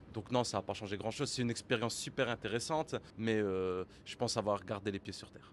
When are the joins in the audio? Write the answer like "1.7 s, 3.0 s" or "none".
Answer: 3.1 s